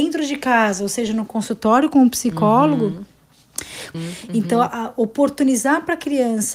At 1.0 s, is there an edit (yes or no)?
no